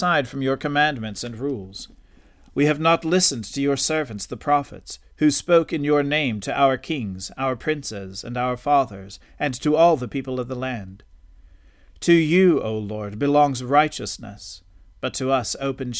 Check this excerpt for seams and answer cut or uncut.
uncut